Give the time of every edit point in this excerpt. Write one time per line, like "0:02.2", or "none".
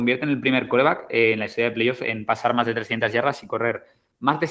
none